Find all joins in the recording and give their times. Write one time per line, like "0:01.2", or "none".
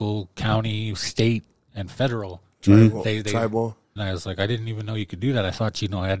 0:04.0